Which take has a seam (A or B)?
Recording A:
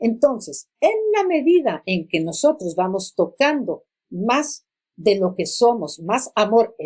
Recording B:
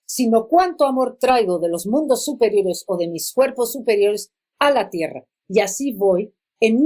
B